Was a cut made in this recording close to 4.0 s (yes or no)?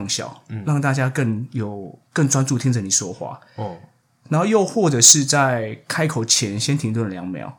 no